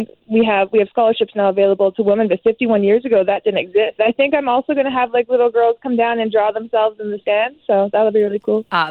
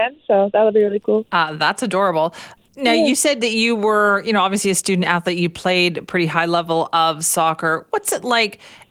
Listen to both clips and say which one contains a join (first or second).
first